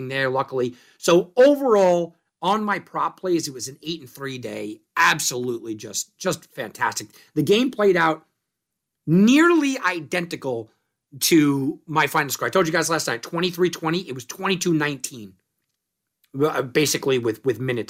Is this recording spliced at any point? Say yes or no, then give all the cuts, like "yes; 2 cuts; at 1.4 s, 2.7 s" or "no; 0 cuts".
no; 0 cuts